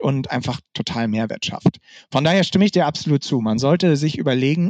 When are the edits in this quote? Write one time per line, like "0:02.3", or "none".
none